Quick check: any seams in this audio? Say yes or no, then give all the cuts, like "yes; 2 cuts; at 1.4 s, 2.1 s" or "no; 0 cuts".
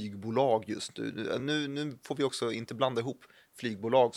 no; 0 cuts